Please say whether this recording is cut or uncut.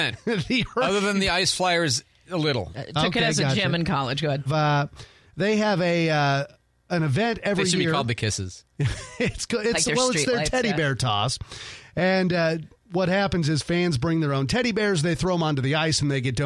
cut